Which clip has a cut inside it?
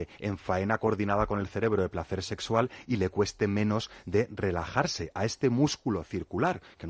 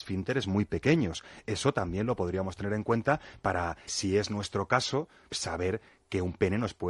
second; 2 cuts; at 3.9 s, 5.3 s

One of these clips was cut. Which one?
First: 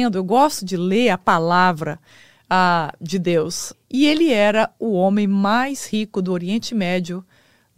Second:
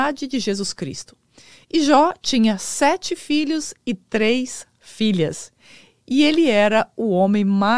first; 1 cut; at 3.7 s

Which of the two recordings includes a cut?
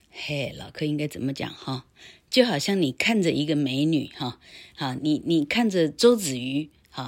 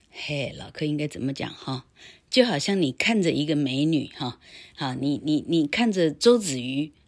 first; 1 cut; at 5.0 s

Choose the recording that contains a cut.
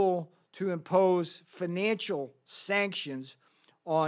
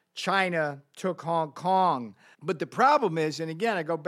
second; 1 cut; at 2.3 s

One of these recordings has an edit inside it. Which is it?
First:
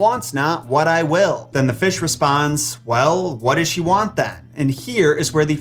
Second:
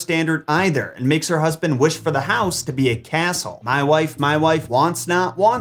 second; 2 cuts; at 3.6 s, 4.7 s

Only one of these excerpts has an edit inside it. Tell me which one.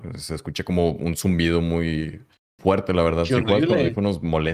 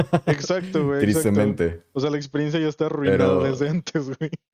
first; 1 cut; at 2.6 s

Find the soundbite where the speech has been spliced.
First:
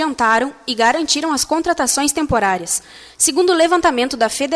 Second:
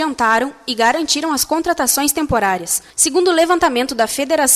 second; 1 cut; at 2.9 s

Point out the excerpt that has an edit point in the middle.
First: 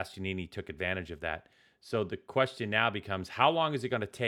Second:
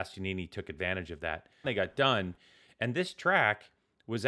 second; 1 cut; at 1.6 s

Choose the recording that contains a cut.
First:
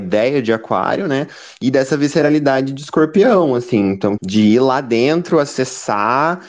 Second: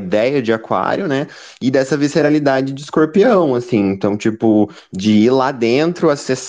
first; 1 cut; at 4.2 s

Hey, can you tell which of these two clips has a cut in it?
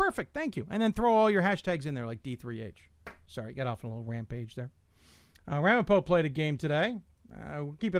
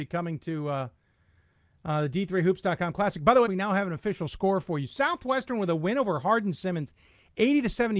second; 1 cut; at 3.5 s

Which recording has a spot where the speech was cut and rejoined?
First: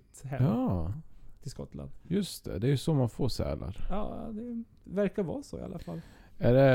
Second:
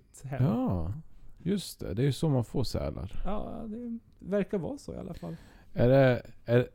second; 1 cut; at 1.4 s

